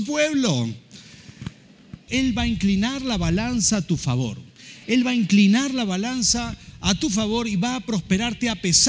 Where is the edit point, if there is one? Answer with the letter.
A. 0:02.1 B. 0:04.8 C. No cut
A